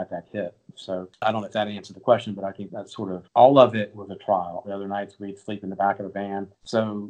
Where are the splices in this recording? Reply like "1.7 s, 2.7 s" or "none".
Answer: 2.7 s, 4.6 s